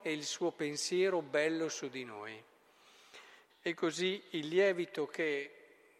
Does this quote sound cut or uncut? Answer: cut